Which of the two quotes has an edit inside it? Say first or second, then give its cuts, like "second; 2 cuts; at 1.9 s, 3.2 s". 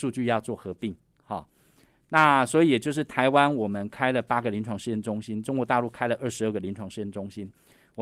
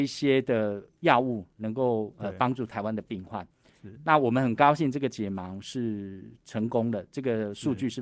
second; 1 cut; at 4.0 s